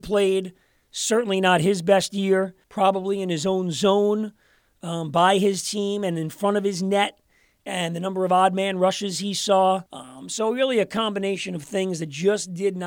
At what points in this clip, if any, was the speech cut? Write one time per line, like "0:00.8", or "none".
0:02.6
0:09.9